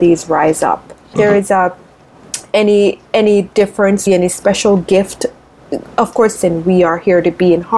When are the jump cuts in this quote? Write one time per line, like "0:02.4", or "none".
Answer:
0:01.1
0:04.1
0:06.4